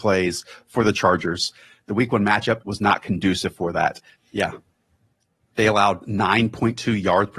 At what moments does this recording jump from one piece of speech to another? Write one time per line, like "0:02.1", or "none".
0:02.6
0:04.2